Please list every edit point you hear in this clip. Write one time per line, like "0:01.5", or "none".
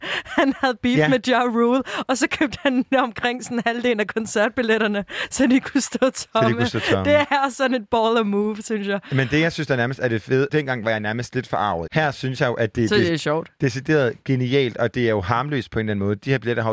0:10.5
0:11.9

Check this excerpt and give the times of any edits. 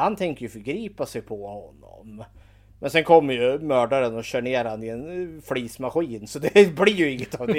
none

